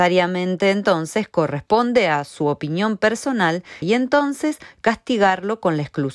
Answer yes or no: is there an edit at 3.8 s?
yes